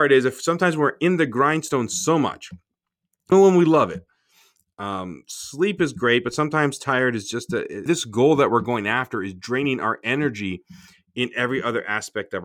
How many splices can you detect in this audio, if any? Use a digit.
2